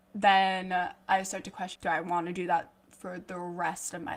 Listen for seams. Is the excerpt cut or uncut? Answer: cut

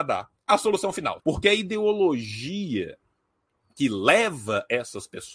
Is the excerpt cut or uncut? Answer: cut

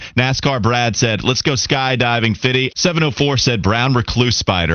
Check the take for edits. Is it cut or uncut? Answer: cut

